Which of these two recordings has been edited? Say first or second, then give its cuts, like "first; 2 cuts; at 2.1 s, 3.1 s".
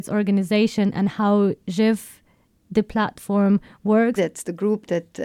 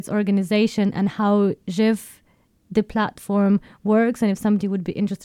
first; 1 cut; at 4.2 s